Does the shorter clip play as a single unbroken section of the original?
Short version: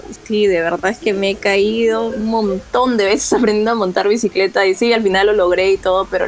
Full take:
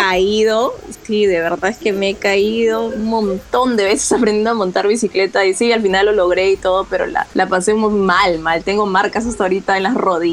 yes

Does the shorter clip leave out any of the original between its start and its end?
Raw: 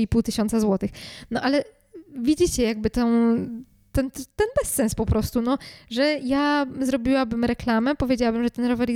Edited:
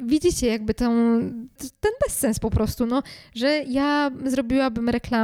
yes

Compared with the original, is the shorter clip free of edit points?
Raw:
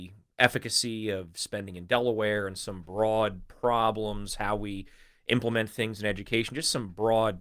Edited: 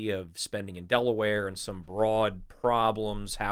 yes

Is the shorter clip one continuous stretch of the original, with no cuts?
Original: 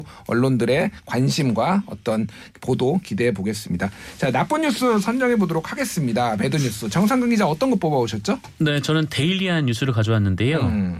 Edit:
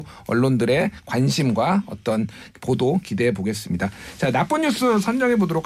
yes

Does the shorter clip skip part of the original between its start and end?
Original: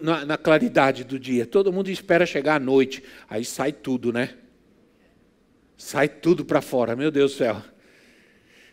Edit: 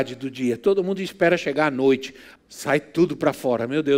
yes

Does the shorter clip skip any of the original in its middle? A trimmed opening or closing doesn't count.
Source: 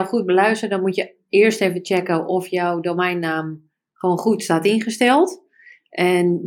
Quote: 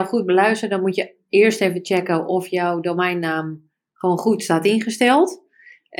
no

